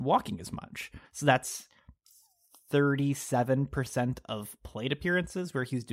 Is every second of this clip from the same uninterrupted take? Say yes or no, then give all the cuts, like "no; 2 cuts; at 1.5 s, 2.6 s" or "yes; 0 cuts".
no; 1 cut; at 1.0 s